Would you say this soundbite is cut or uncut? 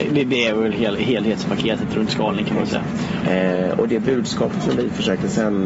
cut